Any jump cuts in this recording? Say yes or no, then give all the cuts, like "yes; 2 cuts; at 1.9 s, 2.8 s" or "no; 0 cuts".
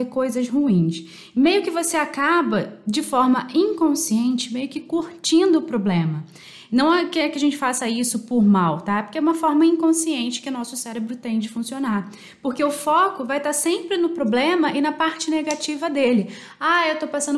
no; 0 cuts